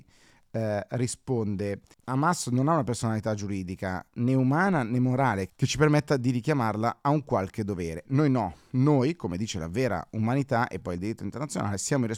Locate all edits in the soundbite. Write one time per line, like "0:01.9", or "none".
0:08.1

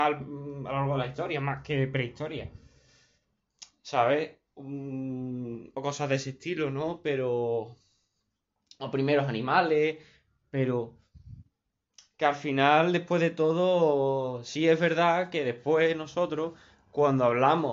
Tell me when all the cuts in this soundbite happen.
none

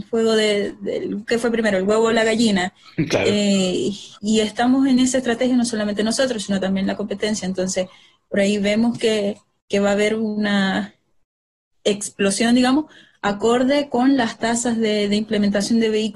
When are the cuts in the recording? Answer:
0:04.2

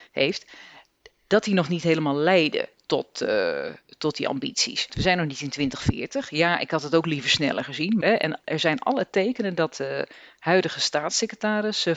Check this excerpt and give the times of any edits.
0:04.9
0:08.0

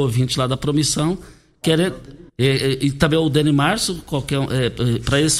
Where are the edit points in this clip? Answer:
0:02.3

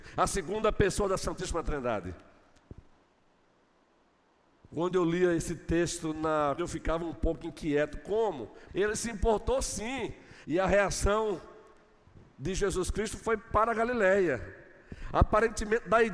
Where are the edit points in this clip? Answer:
0:06.6
0:08.7
0:10.4

